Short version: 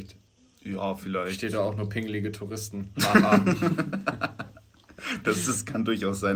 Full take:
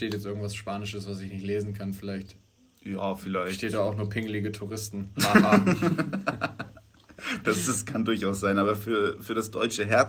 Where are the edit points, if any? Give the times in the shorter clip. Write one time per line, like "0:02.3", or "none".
none